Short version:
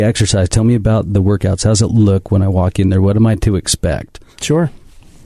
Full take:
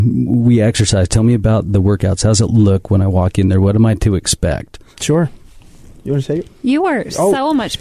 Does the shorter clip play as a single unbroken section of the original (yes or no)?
yes